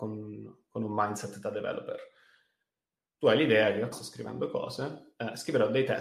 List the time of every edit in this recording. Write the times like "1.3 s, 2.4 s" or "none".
3.9 s